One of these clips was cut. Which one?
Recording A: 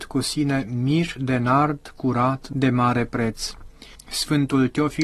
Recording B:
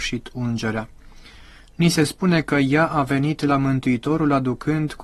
A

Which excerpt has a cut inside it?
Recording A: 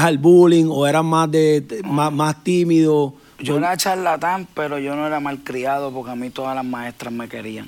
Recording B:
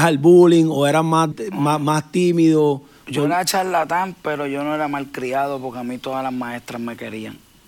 B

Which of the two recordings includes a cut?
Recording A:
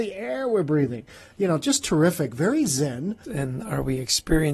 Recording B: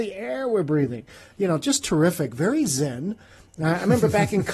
A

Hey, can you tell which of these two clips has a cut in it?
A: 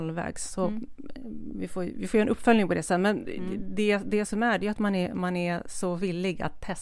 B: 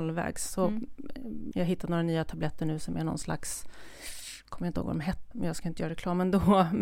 B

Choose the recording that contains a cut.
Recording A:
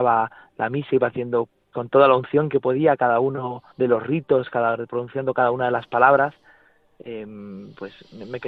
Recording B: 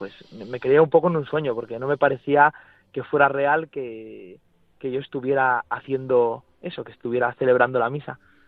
A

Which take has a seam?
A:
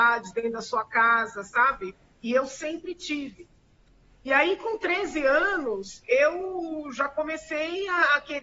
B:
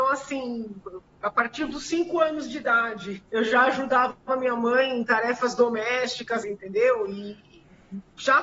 B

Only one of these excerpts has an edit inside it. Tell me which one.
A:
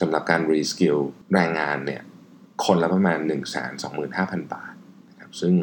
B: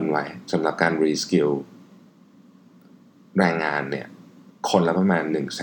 A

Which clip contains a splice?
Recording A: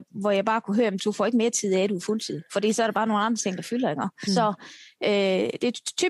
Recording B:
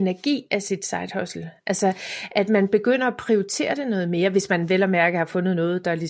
A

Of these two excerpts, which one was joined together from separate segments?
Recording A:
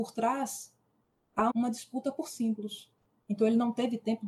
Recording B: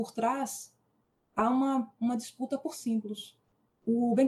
A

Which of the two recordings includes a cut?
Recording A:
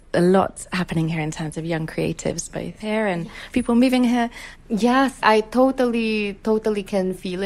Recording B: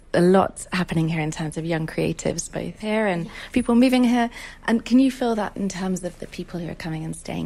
A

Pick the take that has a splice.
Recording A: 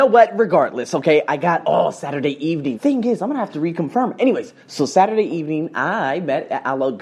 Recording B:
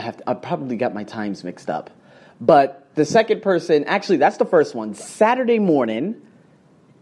A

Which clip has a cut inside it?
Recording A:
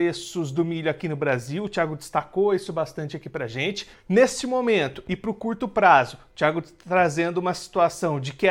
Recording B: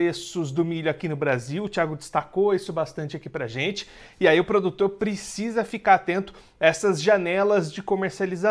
A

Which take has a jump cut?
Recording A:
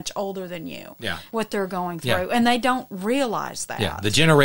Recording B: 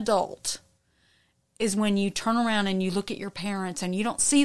A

